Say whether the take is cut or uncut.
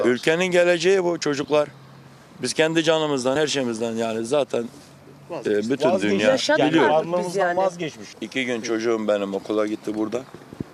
uncut